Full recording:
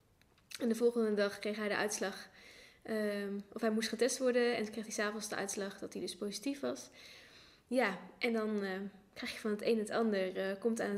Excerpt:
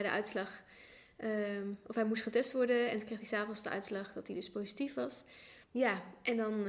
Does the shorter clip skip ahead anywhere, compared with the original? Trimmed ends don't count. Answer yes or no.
yes